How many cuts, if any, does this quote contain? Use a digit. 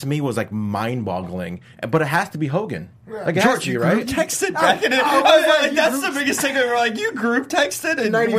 1